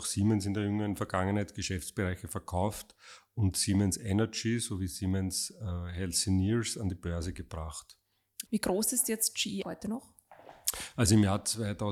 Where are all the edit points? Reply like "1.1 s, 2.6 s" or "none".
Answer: 8.5 s, 9.6 s